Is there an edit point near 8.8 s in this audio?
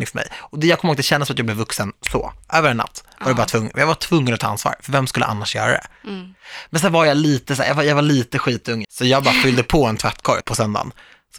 yes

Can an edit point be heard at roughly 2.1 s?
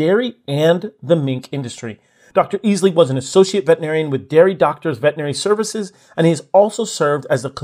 no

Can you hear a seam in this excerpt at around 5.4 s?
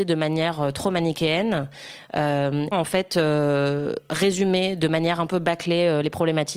no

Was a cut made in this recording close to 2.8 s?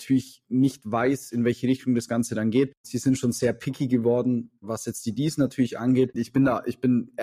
yes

